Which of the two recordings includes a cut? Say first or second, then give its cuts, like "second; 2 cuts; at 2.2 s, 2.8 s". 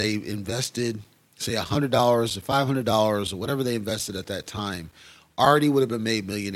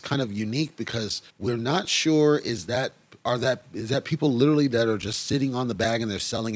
second; 1 cut; at 1.3 s